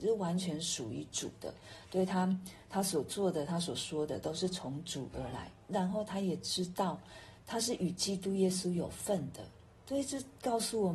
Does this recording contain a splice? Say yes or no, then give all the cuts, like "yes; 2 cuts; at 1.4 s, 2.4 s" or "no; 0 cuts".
no; 0 cuts